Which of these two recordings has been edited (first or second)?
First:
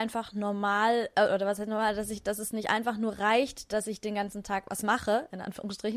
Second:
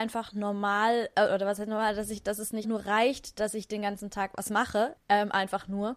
second